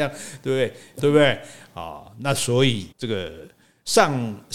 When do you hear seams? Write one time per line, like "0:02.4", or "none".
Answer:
0:01.0
0:02.9